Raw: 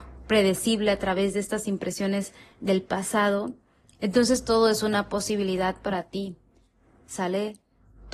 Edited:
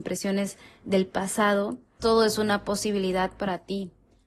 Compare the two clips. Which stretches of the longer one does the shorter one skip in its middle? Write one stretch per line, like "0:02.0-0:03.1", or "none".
0:03.8-0:04.4